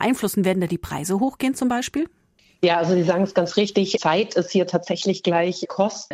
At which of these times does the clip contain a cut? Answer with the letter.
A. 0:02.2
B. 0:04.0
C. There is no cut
C